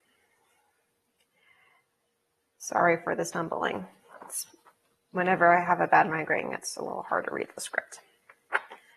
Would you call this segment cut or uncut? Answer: uncut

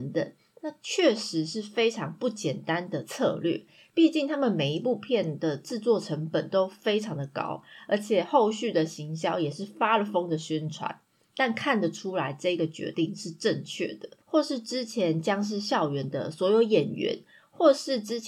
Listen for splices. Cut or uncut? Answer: cut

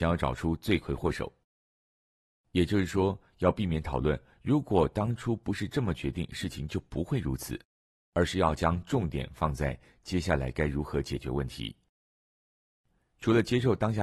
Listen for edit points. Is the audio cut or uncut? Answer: uncut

